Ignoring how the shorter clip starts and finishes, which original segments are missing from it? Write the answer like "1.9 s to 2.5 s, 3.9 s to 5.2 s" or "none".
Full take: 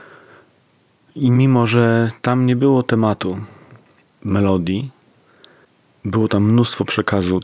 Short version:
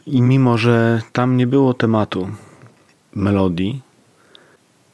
none